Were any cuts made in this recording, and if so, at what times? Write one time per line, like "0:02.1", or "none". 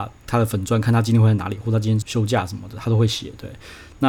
0:02.0